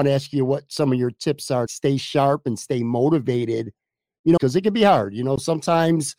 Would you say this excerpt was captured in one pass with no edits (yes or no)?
no